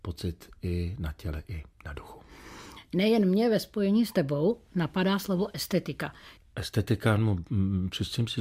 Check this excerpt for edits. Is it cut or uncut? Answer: cut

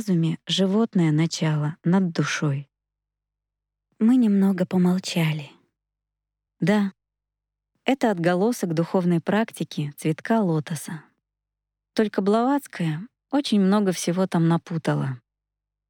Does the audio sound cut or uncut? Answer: cut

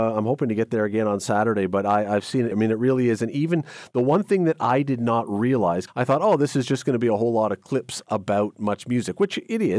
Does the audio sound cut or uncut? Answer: cut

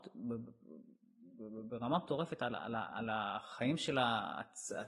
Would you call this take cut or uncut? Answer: uncut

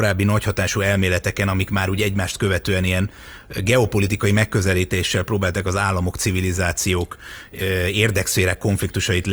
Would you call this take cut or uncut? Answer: uncut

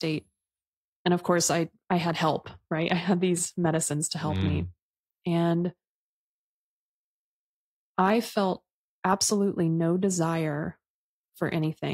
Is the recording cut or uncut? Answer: uncut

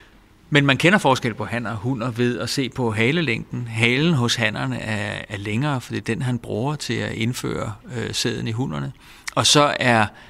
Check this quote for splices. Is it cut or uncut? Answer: uncut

